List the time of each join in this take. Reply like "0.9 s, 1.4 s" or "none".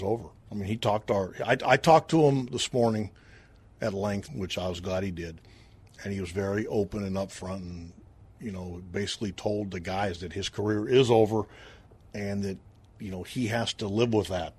4.3 s